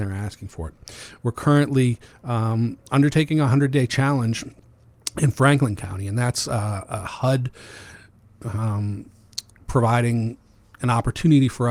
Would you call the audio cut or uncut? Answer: uncut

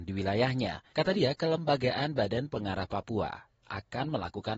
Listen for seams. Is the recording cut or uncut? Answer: cut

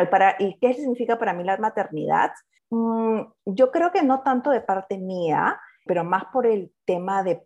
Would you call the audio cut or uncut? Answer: cut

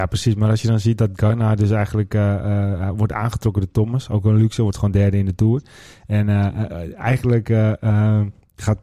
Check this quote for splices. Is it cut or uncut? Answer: uncut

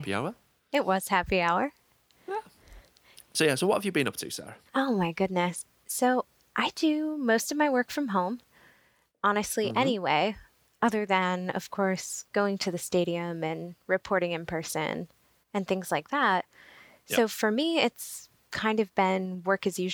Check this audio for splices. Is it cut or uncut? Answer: cut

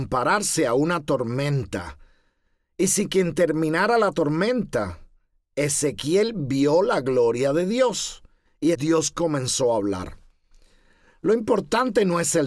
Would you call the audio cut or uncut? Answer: cut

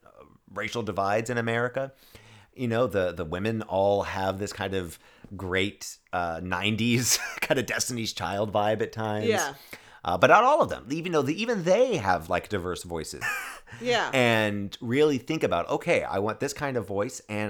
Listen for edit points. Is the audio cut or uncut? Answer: cut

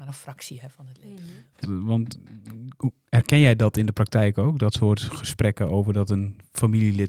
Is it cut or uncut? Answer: cut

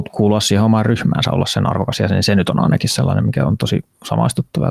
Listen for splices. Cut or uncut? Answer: uncut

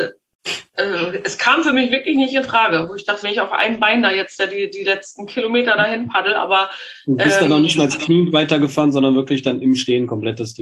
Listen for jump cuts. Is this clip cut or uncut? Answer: cut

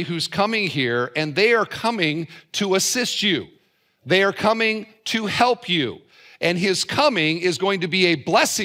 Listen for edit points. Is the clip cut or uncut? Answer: uncut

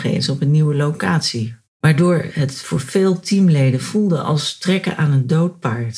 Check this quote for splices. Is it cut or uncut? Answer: cut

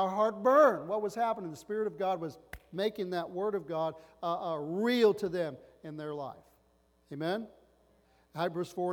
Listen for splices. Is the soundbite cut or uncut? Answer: uncut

